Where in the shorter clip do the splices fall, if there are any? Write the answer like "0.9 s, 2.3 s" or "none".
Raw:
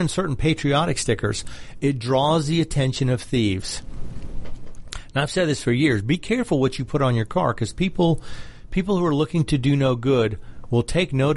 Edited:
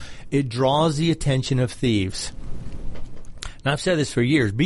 none